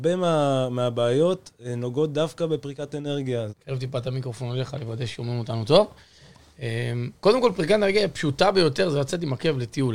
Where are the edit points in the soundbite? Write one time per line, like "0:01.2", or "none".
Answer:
0:03.5